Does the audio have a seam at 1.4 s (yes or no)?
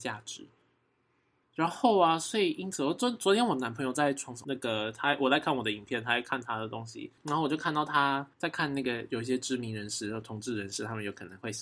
yes